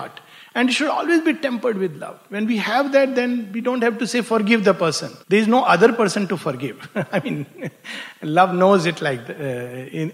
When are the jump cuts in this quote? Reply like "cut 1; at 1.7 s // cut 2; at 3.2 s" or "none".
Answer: cut 1; at 5.2 s